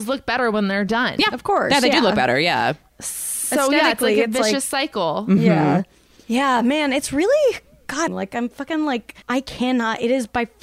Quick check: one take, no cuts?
no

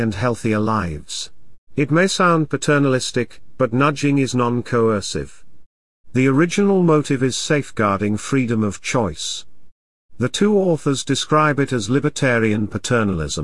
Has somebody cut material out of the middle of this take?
yes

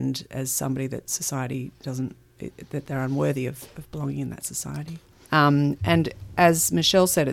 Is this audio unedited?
no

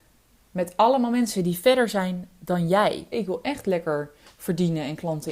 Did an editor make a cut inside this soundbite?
yes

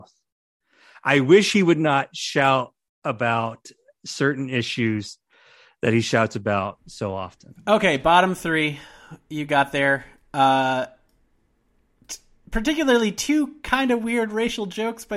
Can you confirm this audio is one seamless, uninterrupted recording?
yes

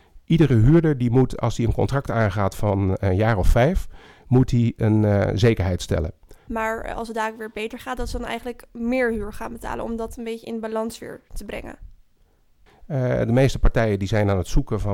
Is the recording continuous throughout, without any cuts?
no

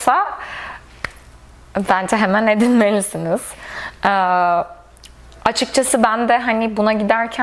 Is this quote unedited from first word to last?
yes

